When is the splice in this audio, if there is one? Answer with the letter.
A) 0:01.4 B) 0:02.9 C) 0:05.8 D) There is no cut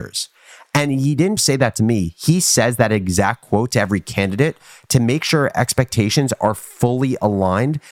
A